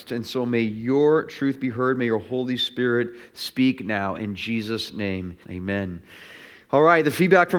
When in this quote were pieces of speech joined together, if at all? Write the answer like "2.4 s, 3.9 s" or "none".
5.4 s